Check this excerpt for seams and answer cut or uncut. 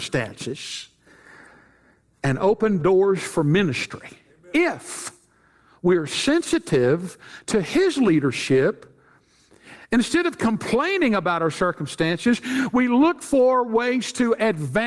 uncut